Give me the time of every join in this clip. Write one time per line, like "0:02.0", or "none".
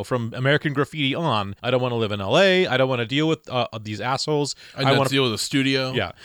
0:01.6